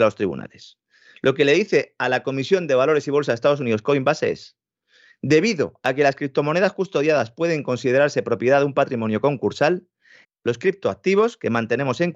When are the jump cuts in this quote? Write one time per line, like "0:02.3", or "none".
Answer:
0:10.2